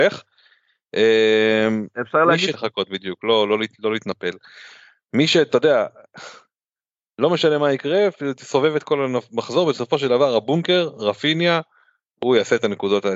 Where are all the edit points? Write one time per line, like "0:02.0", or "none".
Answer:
0:02.5